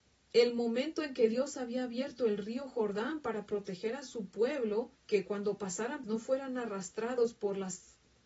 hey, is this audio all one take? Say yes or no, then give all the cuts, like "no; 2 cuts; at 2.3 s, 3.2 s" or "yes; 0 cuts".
no; 2 cuts; at 5.0 s, 6.0 s